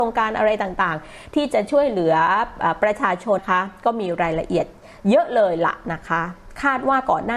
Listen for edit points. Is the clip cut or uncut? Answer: cut